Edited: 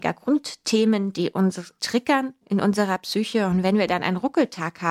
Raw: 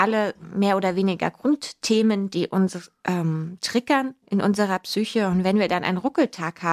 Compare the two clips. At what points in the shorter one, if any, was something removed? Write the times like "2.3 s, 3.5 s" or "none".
1.8 s